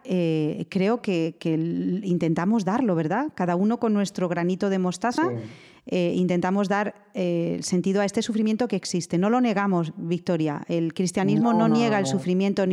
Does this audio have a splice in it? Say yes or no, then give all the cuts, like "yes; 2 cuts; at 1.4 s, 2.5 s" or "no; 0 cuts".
no; 0 cuts